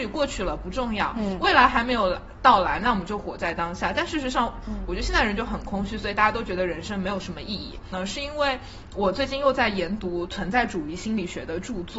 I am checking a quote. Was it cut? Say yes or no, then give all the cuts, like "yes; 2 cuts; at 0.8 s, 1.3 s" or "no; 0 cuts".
yes; 2 cuts; at 4.6 s, 7.9 s